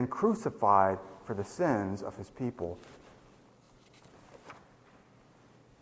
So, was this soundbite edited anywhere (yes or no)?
no